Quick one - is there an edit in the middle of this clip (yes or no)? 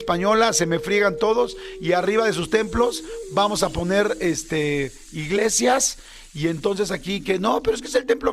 no